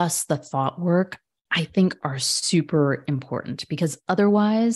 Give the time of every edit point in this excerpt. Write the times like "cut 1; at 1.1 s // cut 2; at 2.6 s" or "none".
none